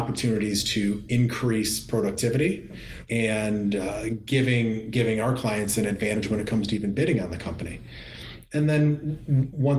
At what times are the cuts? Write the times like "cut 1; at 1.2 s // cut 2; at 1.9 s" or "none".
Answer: cut 1; at 3.1 s

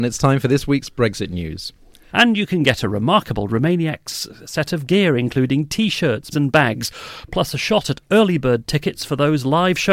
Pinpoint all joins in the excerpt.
cut 1; at 2.1 s // cut 2; at 6.3 s

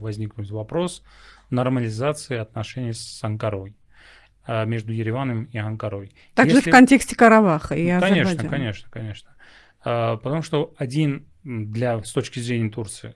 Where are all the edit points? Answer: none

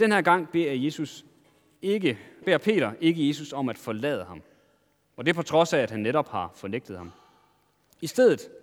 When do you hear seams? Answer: cut 1; at 2.4 s

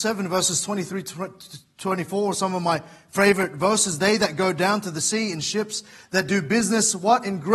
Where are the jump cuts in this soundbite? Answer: none

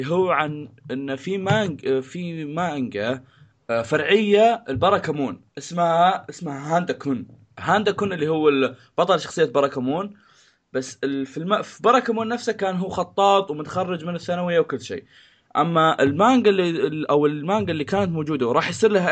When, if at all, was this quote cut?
cut 1; at 5.5 s

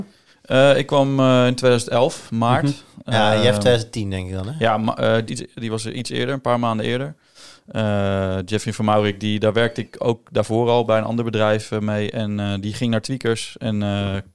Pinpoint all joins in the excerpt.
cut 1; at 5.3 s

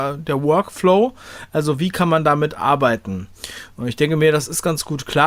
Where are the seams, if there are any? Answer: none

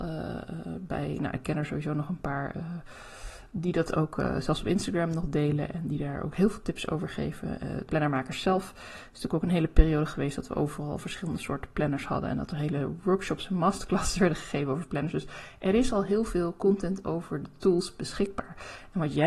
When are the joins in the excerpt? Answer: cut 1; at 7.9 s

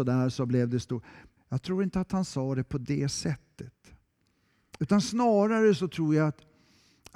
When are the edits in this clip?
cut 1; at 1.4 s

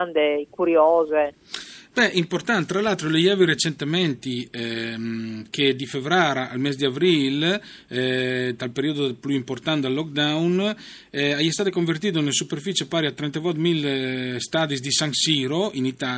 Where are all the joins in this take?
none

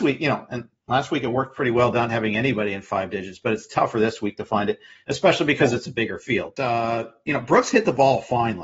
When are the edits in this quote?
cut 1; at 6.6 s

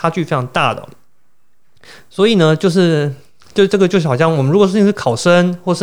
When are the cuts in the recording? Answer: cut 1; at 2.0 s

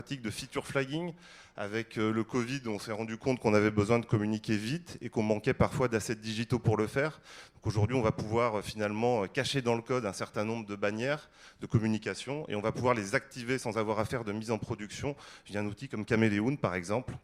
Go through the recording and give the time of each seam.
none

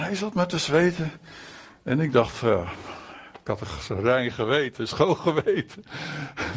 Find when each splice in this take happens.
none

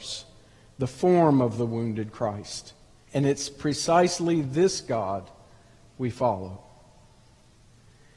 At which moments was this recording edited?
cut 1; at 3.0 s

